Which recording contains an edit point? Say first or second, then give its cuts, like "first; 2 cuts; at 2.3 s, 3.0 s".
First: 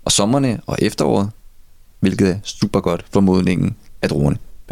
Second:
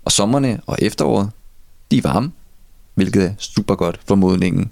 first; 1 cut; at 1.8 s